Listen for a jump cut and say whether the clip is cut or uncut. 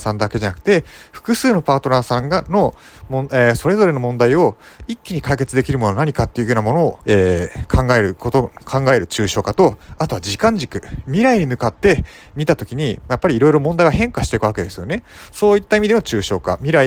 cut